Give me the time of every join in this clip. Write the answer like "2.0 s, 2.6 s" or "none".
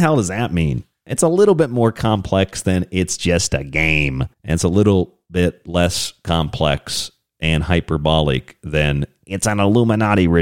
4.3 s